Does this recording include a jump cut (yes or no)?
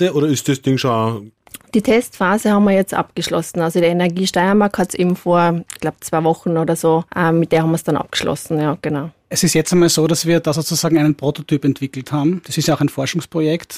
yes